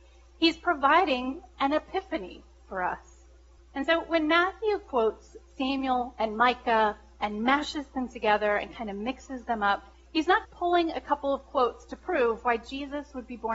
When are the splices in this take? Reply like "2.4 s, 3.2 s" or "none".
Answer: 3.6 s, 10.4 s